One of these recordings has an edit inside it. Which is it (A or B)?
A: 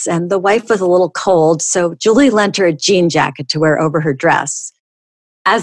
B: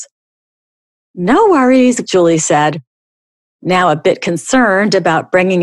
B